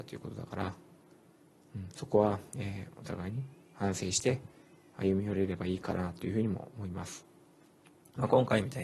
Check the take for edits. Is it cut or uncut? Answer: uncut